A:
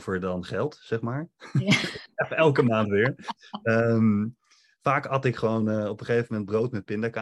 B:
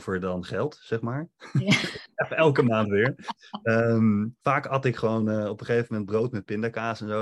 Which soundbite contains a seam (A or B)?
B